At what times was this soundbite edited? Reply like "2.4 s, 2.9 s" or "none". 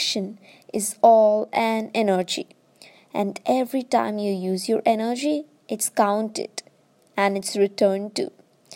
none

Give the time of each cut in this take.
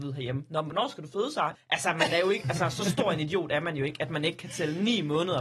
1.6 s

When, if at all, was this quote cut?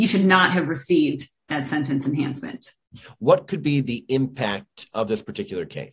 none

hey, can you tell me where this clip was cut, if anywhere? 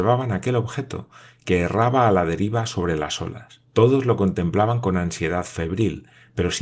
3.7 s

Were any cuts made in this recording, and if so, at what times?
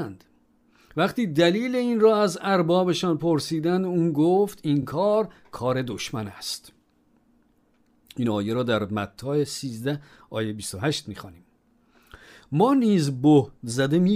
none

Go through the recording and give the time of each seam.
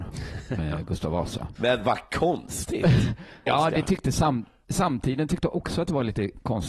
1.6 s, 3.5 s, 4.6 s

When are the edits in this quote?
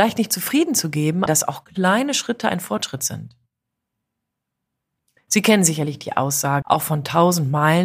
1.3 s, 6.6 s

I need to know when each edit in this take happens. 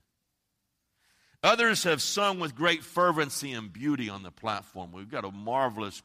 none

